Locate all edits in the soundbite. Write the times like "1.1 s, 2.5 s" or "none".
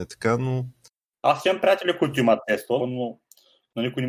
1.1 s, 2.8 s

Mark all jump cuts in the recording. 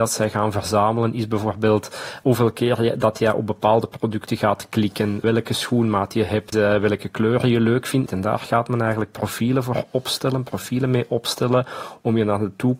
6.5 s, 8.1 s

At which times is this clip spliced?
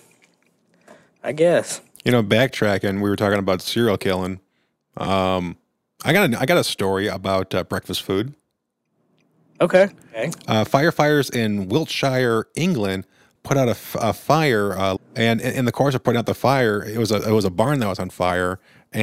15.0 s

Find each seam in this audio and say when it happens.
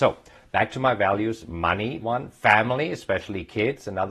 2.0 s

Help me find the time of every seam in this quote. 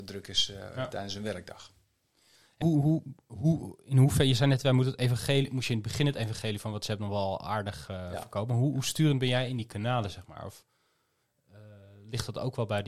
2.6 s

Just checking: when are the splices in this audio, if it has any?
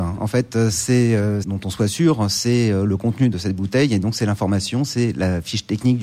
1.4 s

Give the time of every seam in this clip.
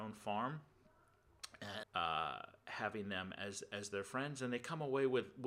1.8 s

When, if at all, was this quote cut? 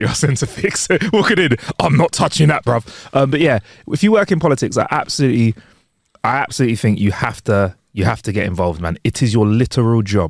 none

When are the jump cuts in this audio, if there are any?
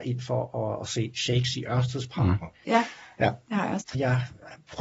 2.6 s, 3.8 s

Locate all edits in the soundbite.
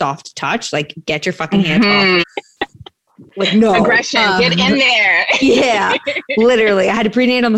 2.2 s

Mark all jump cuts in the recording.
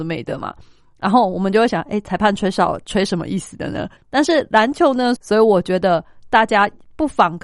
4.0 s, 5.2 s

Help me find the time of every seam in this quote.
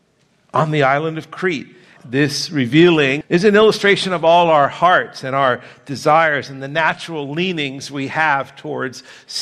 2.0 s, 3.2 s

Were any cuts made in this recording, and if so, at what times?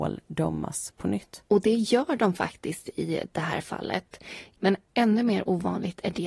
1.5 s, 4.6 s

